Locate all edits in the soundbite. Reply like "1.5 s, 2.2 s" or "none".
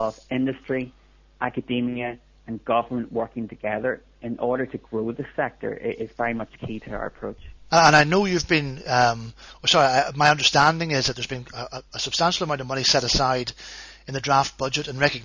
7.7 s